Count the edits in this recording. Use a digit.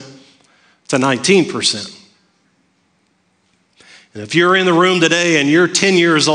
0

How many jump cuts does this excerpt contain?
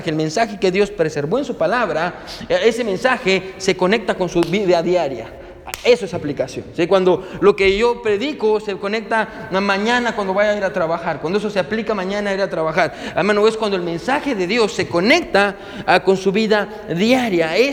0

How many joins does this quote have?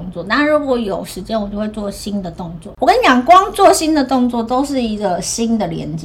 0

